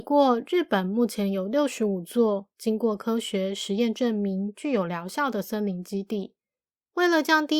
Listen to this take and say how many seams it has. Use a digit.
0